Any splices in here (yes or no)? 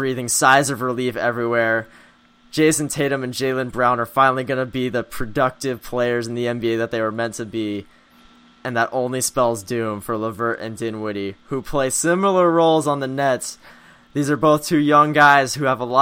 no